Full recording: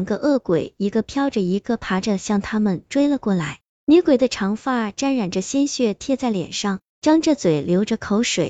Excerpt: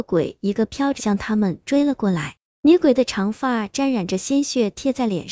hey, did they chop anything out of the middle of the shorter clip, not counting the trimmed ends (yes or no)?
yes